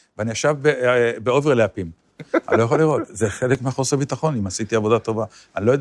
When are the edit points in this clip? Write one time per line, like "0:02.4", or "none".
0:02.0